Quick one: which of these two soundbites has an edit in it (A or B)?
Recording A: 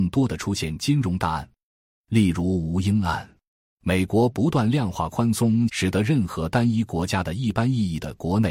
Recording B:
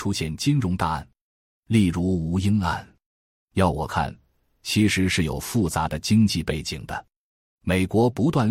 A